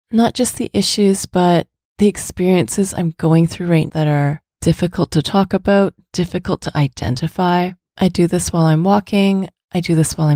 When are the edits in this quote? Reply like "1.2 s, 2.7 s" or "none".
3.9 s

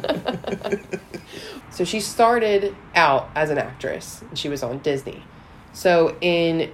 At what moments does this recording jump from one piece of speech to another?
1.6 s

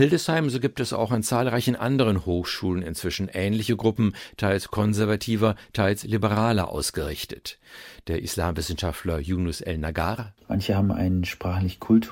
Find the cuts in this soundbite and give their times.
none

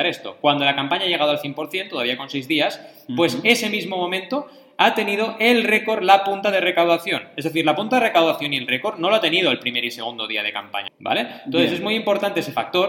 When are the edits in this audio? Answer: 10.9 s

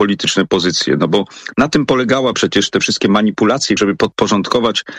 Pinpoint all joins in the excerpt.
2.3 s, 3.8 s

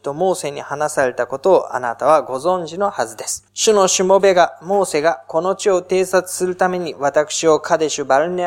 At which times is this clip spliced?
3.5 s

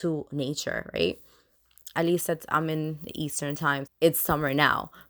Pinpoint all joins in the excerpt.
1.9 s, 3.9 s

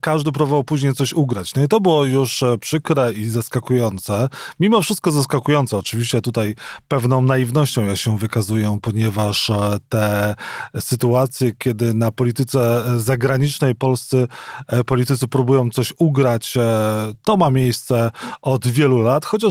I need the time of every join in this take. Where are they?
none

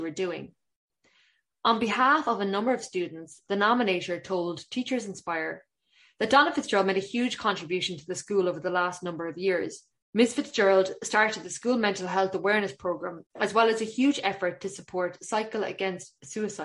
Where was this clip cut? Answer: 10.0 s, 13.3 s

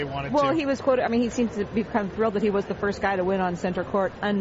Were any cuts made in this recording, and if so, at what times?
none

